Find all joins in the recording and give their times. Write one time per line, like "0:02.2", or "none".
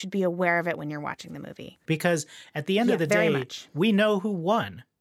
0:01.9